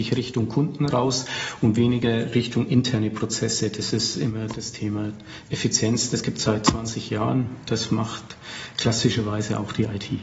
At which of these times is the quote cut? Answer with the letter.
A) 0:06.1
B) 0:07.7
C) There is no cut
C